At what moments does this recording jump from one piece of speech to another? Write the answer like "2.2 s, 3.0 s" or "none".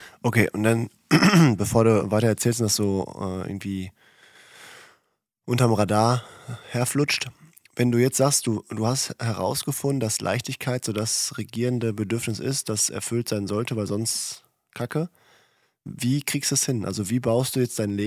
none